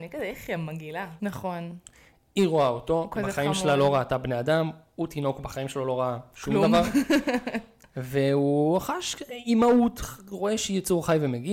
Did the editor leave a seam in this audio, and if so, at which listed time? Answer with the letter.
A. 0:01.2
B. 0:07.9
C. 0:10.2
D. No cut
A